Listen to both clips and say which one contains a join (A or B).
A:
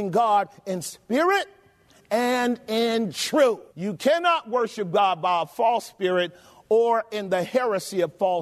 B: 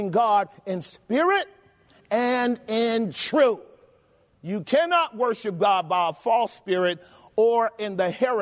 A